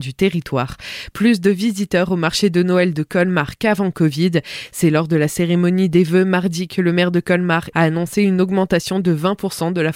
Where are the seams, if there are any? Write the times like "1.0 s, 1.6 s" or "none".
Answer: 7.7 s